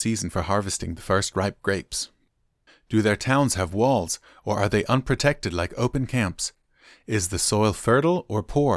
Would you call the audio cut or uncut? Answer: cut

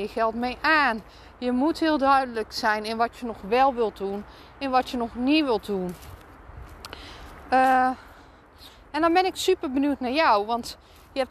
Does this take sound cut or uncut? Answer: uncut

